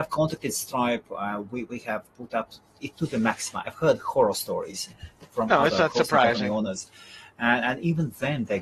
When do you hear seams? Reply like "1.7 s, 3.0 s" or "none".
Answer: none